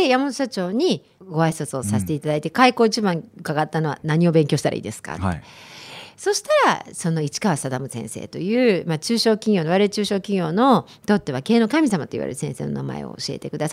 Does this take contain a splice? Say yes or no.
no